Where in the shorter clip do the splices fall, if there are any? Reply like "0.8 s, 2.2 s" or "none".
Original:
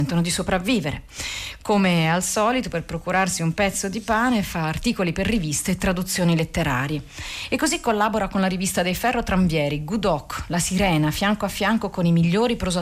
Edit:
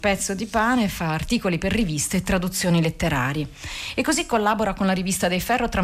none